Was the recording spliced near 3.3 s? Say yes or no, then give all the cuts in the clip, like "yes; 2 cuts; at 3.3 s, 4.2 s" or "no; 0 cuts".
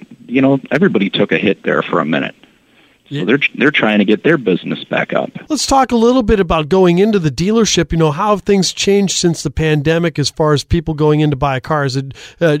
no; 1 cut; at 5.5 s